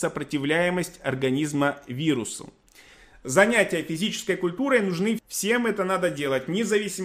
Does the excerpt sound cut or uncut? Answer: cut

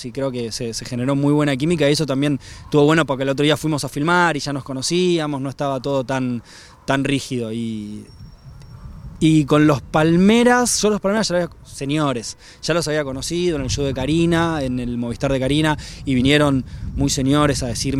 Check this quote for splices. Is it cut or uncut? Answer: uncut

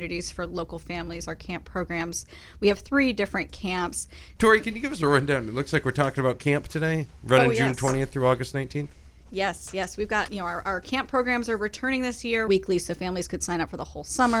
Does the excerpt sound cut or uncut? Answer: cut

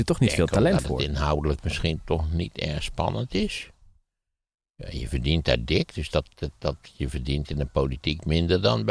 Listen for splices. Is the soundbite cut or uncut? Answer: uncut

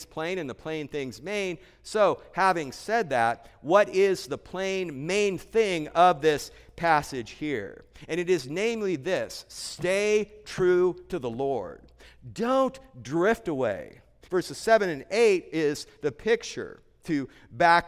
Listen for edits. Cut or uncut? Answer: cut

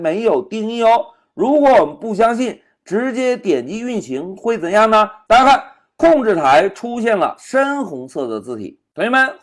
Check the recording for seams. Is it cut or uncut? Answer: cut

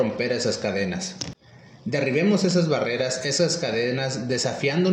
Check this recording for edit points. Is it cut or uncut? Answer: uncut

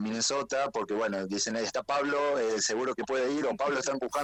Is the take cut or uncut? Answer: uncut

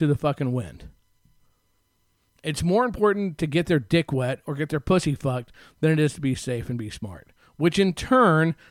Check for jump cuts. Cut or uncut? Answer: uncut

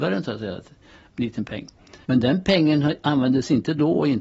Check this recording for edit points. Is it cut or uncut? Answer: cut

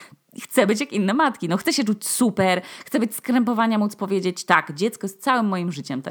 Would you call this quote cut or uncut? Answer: uncut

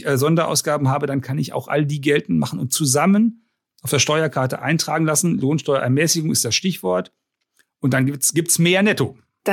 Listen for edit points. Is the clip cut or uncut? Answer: uncut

